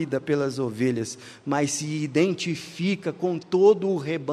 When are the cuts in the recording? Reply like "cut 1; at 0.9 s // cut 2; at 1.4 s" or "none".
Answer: none